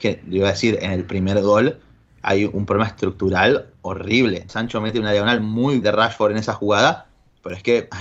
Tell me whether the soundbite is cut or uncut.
cut